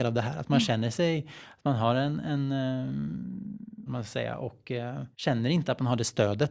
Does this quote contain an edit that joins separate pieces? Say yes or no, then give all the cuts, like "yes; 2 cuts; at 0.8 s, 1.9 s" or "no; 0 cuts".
yes; 2 cuts; at 3.9 s, 5.1 s